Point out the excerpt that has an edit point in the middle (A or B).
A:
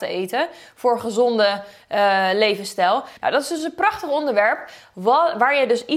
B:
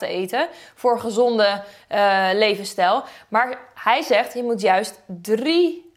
A